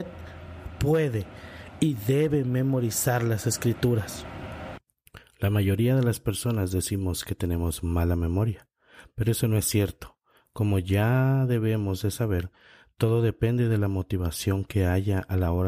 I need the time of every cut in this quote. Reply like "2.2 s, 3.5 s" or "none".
none